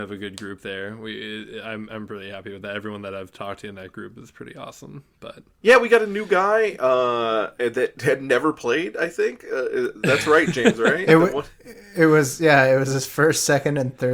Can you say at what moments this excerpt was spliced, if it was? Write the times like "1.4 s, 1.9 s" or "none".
none